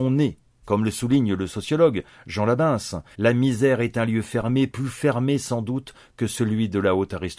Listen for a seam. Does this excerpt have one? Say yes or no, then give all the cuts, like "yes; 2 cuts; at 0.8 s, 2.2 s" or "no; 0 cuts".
yes; 1 cut; at 3.1 s